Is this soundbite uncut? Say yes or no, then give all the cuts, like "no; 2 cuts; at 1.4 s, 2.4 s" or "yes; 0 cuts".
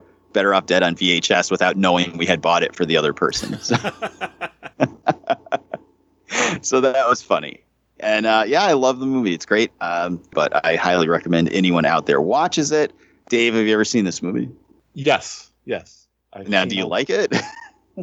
no; 1 cut; at 10.3 s